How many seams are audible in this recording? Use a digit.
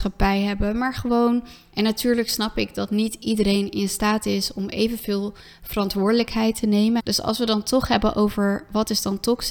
2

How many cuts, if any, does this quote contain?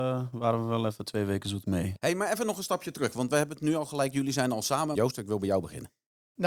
1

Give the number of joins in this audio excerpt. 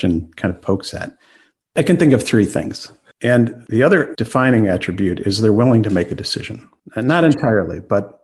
2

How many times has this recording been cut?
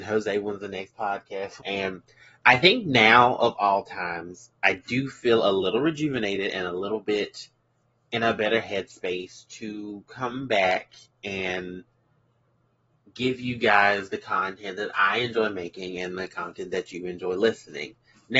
1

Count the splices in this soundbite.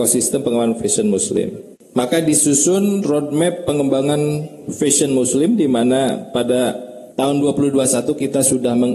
1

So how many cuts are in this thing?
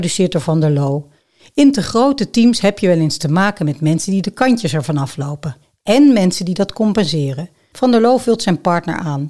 1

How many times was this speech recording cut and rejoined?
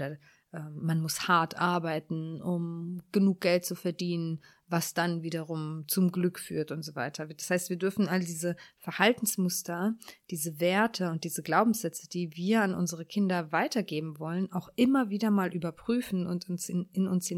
0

